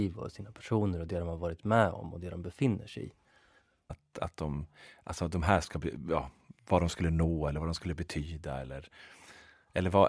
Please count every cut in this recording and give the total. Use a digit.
1